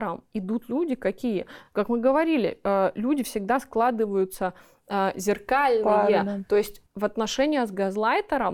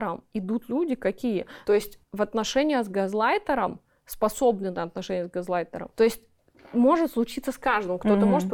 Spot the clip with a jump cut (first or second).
second